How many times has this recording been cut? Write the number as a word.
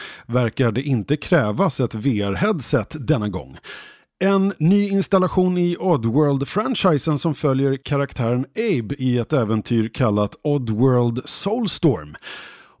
zero